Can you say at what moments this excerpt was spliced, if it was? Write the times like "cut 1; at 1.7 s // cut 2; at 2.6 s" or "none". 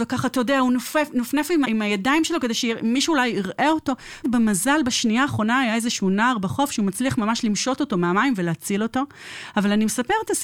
cut 1; at 1.6 s // cut 2; at 4.2 s